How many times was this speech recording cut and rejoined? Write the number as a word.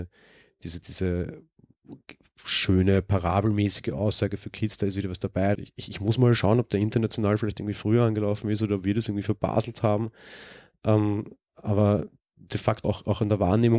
two